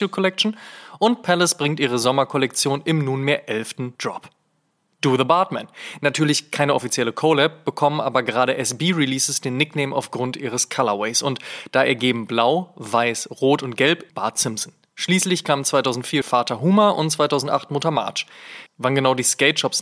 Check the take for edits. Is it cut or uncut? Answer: cut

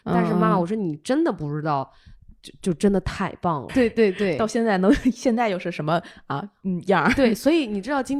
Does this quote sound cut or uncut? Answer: cut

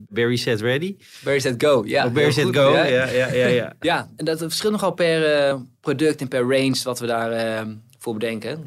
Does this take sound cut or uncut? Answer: uncut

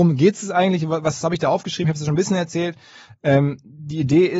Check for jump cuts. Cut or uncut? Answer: uncut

